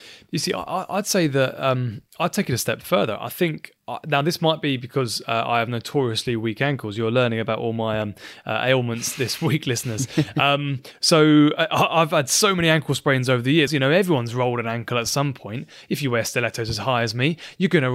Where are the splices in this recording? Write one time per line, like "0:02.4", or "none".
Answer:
0:03.8
0:13.7